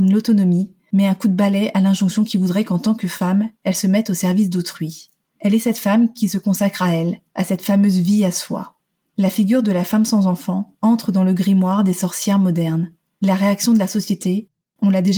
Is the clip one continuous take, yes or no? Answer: no